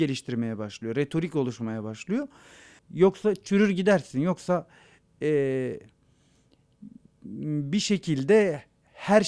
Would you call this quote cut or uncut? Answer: cut